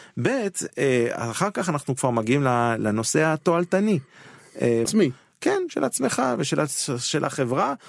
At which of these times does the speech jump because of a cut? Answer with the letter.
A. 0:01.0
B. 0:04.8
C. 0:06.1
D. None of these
B